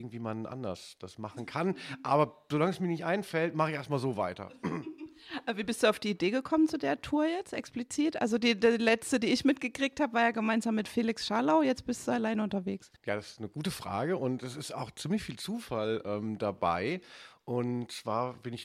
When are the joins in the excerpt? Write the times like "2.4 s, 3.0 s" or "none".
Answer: 13.0 s

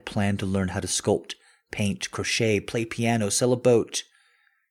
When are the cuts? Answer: none

